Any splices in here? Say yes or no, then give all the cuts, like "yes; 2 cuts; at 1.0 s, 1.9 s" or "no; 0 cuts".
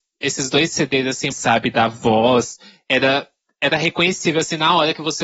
yes; 1 cut; at 1.3 s